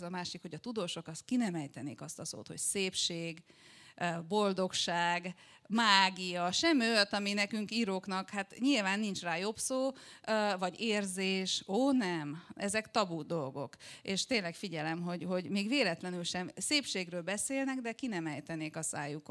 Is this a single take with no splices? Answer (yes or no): yes